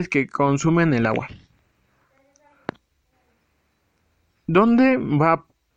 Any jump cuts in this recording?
no; 0 cuts

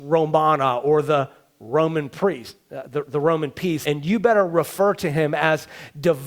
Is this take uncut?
no; 1 cut; at 3.8 s

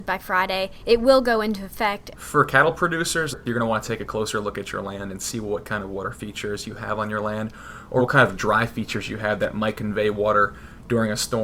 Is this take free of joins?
no; 2 cuts; at 2.1 s, 8.0 s

